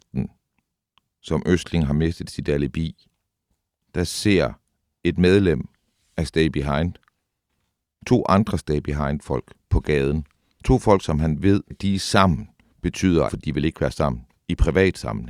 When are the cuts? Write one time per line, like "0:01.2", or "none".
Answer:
0:11.7
0:13.3

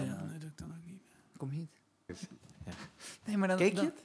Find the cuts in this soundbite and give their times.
0:02.1

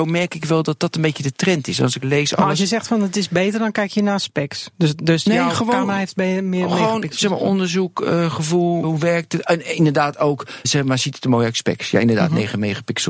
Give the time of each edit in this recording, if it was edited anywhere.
0:08.8
0:10.6

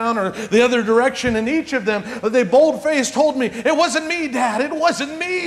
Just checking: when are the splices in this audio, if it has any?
none

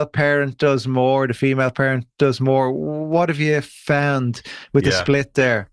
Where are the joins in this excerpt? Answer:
none

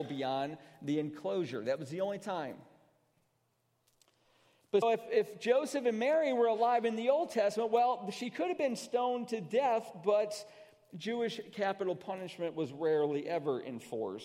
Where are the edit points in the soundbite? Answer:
0:04.8

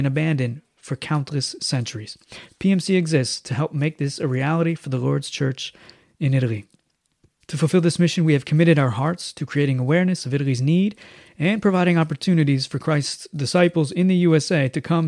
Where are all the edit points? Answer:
0:07.4

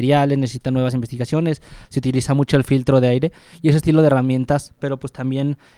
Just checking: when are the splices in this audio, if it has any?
0:01.8
0:04.8

